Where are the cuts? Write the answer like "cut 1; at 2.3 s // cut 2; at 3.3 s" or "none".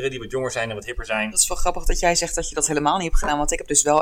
cut 1; at 1.3 s